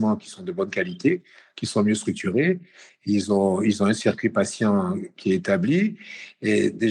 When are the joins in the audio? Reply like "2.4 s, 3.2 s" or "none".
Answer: none